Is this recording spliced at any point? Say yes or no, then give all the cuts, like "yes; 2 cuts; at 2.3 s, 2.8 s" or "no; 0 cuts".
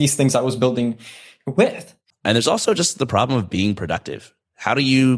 yes; 1 cut; at 2.1 s